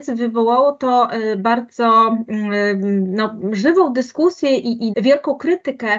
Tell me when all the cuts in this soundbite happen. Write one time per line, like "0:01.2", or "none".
0:04.9